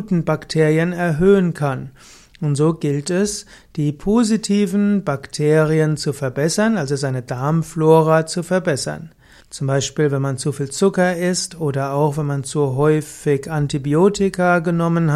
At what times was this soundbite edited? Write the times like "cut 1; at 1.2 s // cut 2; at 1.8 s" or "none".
cut 1; at 9.4 s